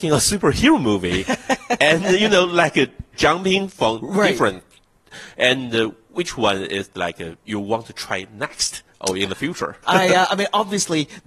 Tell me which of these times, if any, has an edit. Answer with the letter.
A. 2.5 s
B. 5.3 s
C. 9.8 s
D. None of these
C